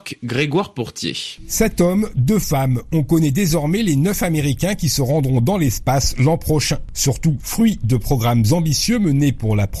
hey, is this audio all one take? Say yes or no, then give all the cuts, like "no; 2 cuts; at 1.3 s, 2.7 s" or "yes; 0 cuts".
no; 1 cut; at 7.4 s